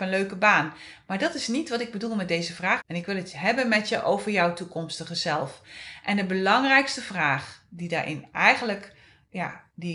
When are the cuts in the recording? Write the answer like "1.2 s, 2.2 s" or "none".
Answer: 2.8 s